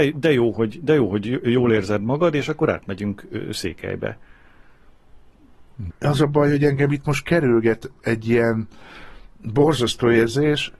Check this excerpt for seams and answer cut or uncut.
cut